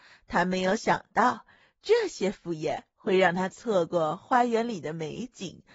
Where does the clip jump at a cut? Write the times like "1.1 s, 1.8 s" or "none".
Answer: none